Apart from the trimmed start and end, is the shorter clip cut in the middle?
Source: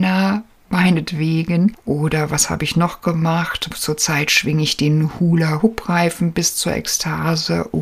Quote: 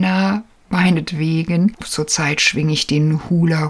yes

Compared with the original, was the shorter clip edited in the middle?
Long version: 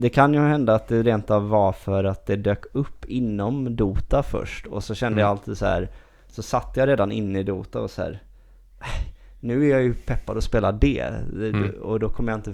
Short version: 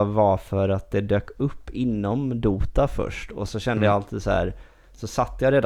no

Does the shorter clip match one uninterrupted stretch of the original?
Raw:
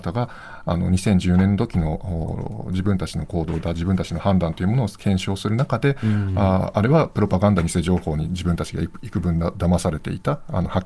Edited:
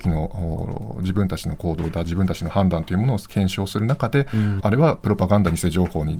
no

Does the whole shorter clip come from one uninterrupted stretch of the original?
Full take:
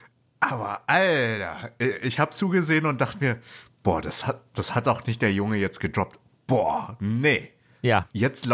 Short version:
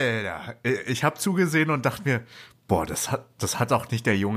yes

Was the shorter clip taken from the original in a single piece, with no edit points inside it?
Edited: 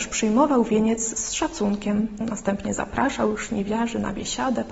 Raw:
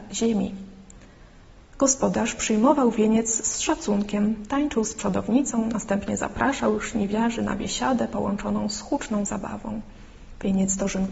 no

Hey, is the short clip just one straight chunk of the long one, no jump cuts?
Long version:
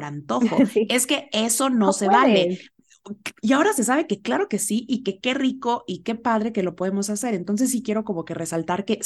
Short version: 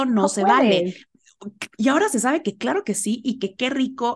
yes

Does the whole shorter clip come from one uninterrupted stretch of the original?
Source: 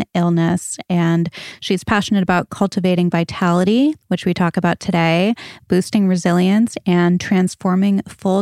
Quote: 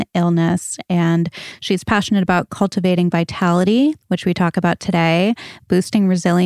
yes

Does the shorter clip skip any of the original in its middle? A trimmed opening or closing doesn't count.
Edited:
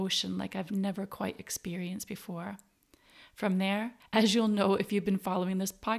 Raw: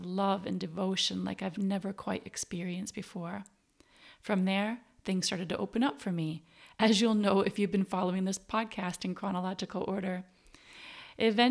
yes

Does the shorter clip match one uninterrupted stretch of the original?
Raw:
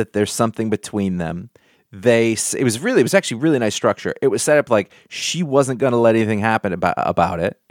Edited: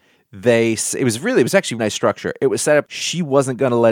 no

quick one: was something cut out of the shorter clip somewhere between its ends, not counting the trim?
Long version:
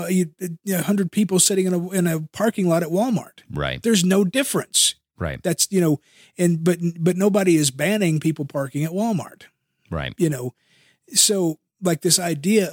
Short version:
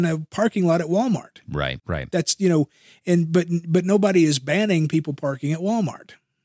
yes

